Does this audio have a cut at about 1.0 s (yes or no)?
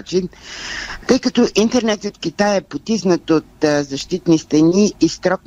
yes